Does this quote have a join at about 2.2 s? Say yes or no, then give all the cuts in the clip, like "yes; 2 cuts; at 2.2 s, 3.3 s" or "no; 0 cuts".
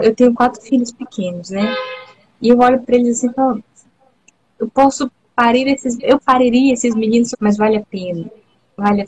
no; 2 cuts; at 6.0 s, 7.3 s